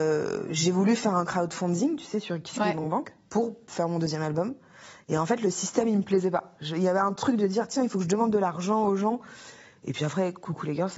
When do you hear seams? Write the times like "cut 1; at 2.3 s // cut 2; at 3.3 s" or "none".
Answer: none